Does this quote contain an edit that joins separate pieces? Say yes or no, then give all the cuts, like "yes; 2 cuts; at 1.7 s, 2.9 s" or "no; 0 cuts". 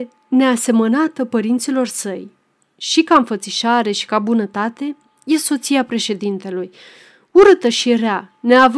no; 0 cuts